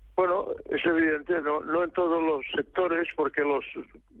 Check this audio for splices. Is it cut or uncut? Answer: uncut